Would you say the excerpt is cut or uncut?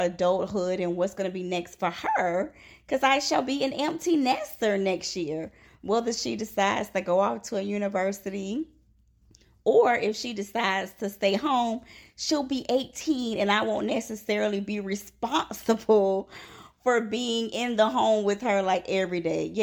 uncut